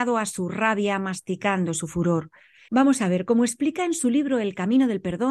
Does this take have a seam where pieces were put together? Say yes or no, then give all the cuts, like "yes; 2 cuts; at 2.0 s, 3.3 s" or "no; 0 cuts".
yes; 1 cut; at 2.7 s